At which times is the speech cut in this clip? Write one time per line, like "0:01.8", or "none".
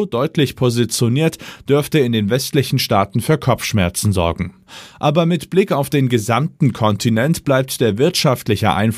none